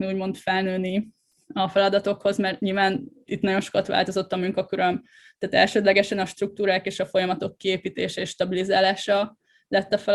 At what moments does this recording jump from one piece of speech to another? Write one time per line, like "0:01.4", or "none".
0:03.3

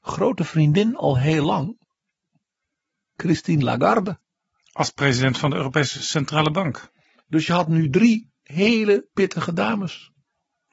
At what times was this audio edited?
none

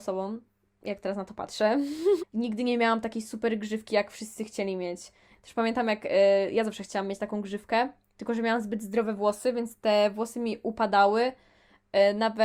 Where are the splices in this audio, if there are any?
0:02.2
0:05.4

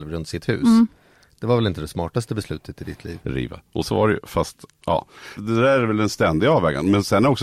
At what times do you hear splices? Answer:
0:03.2
0:05.4

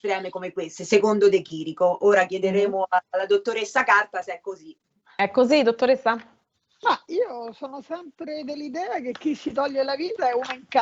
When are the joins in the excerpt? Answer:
none

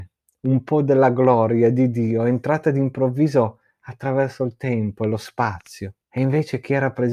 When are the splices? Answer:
0:06.0

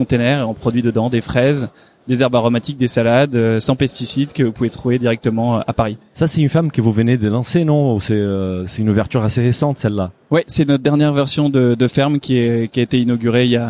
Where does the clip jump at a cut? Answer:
none

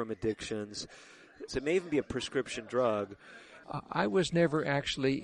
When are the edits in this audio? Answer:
0:01.5
0:03.6

